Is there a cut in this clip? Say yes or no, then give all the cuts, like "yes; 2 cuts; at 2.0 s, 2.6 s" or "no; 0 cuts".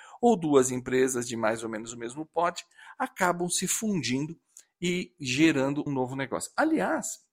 yes; 1 cut; at 5.9 s